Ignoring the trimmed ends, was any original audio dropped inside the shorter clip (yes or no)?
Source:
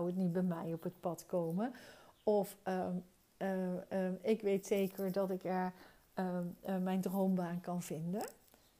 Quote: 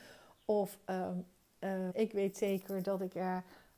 yes